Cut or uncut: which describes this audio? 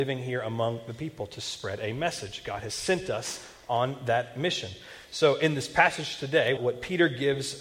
cut